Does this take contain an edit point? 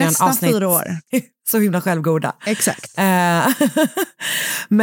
yes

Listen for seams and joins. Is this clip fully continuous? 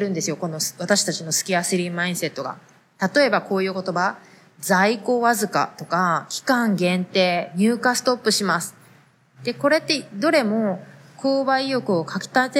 yes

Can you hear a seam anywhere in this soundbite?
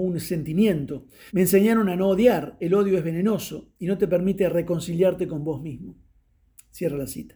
yes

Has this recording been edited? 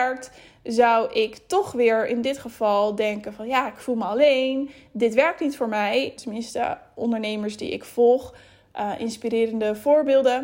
yes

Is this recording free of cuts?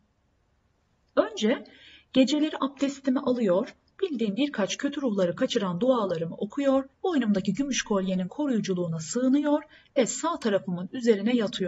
no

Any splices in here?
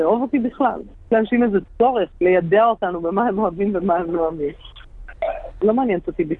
yes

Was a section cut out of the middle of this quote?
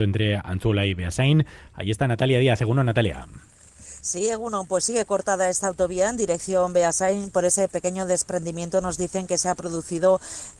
no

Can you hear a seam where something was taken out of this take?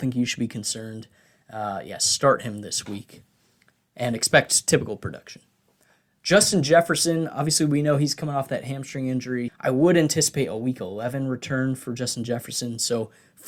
yes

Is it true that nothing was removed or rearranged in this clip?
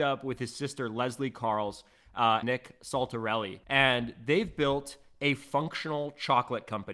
no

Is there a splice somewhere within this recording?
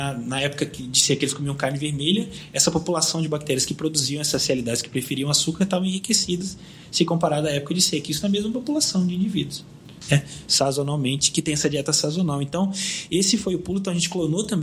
no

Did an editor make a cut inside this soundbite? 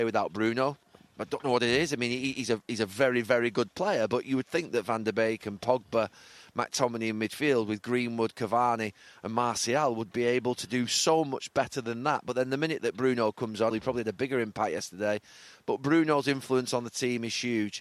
yes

